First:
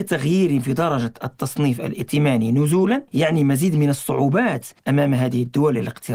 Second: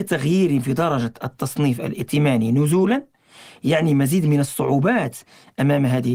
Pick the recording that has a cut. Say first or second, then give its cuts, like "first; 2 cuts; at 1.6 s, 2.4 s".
first; 2 cuts; at 3.1 s, 4.8 s